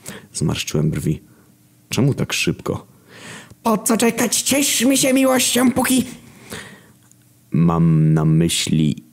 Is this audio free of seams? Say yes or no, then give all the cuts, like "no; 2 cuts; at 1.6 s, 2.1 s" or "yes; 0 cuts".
yes; 0 cuts